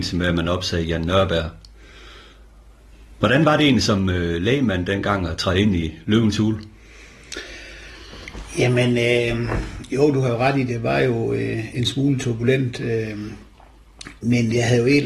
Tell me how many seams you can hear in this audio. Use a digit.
1